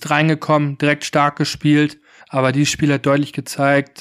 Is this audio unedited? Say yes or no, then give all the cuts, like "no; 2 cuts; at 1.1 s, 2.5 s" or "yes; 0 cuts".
no; 1 cut; at 2.2 s